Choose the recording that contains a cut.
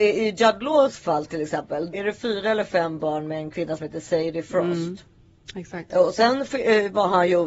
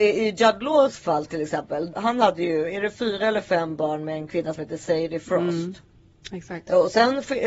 first; 1 cut; at 1.9 s

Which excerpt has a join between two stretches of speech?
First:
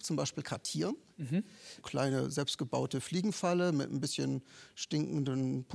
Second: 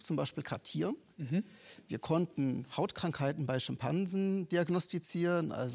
first; 1 cut; at 1.8 s

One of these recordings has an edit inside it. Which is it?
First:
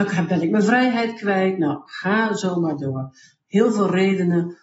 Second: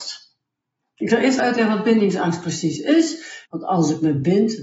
second; 2 cuts; at 1.4 s, 3.5 s

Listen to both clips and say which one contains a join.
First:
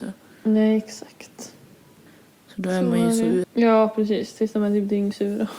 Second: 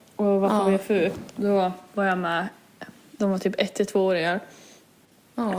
first; 1 cut; at 3.4 s

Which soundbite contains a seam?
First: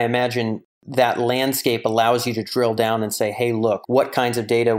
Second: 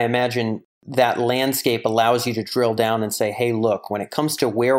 first; 1 cut; at 3.8 s

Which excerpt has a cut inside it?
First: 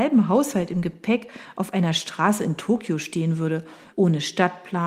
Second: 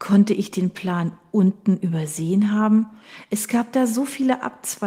first; 1 cut; at 3.9 s

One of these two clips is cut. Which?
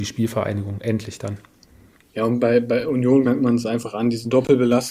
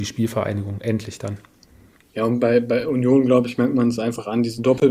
first; 1 cut; at 3.2 s

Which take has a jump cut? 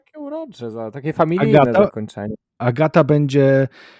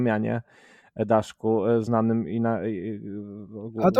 first; 1 cut; at 2.6 s

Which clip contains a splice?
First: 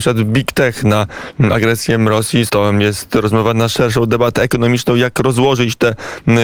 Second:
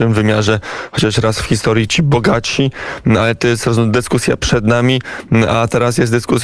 first; 1 cut; at 2.5 s

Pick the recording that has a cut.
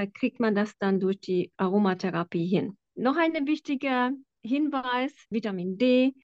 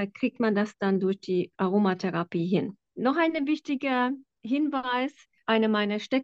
first; 1 cut; at 5.3 s

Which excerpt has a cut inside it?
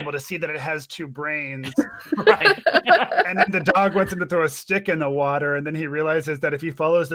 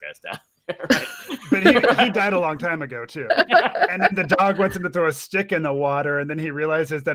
second; 1 cut; at 3.3 s

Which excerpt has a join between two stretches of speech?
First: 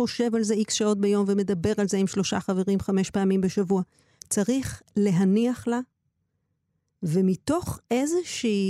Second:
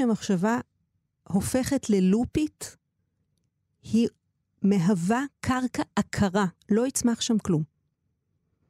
first; 1 cut; at 4.2 s

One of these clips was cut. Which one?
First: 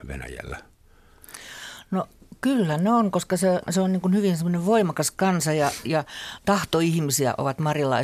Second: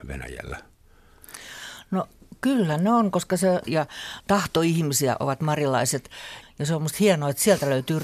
second; 2 cuts; at 3.6 s, 6.4 s

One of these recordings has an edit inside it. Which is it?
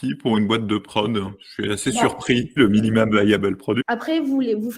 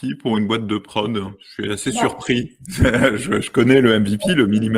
first; 2 cuts; at 2.6 s, 3.8 s

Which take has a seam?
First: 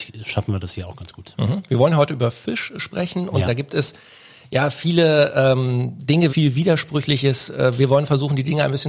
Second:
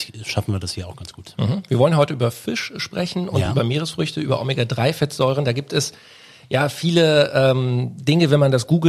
first; 2 cuts; at 3.5 s, 6.3 s

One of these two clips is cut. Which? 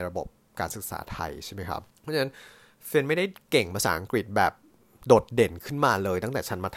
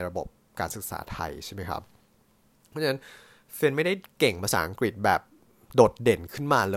first; 1 cut; at 1.9 s

